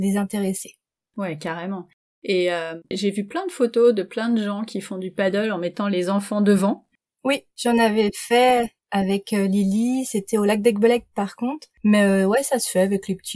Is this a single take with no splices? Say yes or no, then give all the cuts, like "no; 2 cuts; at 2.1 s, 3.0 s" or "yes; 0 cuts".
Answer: yes; 0 cuts